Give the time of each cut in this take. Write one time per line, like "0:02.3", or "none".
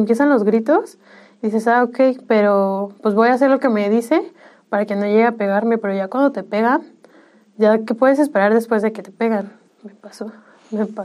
0:09.7